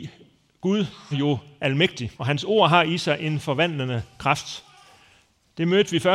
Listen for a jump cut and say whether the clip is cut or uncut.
cut